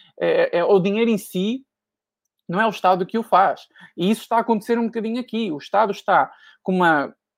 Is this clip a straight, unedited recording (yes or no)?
yes